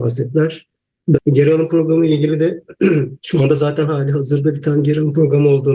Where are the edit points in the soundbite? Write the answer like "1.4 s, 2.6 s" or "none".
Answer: 1.2 s, 3.2 s